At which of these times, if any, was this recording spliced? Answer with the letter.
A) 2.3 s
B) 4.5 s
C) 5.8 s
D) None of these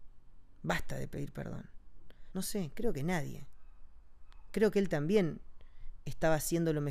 A